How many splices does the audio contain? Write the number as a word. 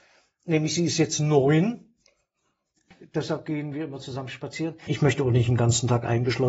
two